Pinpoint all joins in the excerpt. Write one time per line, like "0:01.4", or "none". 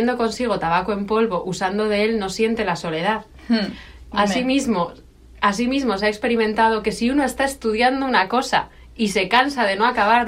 0:04.1

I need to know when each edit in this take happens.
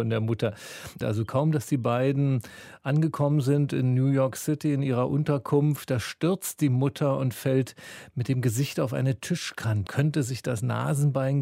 0:01.0
0:09.9

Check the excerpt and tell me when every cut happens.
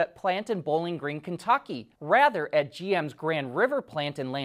0:01.9

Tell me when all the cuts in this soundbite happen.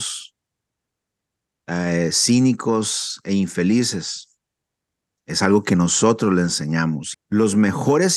0:05.2
0:07.1

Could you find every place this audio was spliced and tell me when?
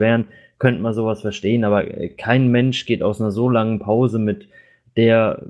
none

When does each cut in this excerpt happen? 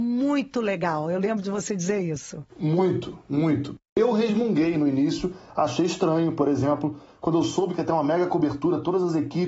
none

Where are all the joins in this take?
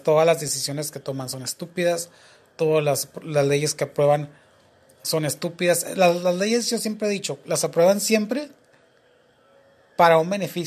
none

